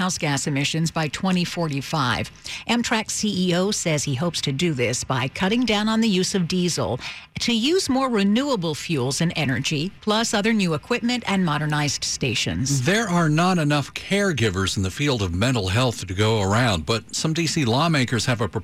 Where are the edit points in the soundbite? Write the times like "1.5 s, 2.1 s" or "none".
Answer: 10.0 s

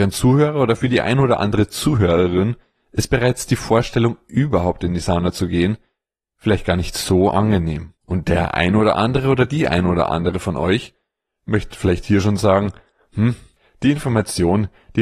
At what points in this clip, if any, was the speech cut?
8.0 s

